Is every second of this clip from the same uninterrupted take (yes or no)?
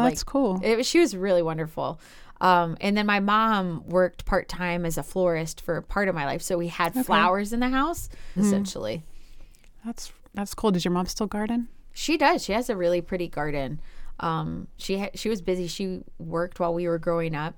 no